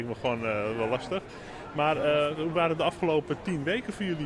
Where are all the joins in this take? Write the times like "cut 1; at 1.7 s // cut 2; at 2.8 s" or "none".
none